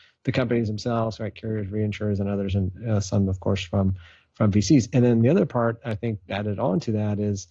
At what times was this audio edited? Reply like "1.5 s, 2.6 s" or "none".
none